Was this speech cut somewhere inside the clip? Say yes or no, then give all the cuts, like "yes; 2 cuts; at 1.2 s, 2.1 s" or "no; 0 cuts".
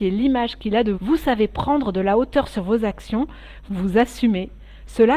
yes; 2 cuts; at 0.9 s, 3.7 s